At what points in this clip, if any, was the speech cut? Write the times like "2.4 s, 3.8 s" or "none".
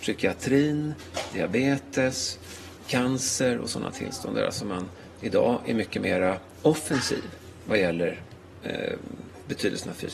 none